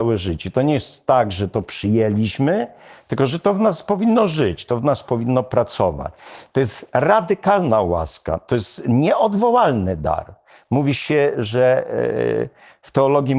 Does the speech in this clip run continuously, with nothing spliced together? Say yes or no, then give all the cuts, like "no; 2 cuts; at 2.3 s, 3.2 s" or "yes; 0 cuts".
yes; 0 cuts